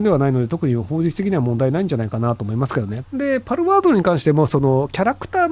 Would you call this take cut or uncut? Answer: cut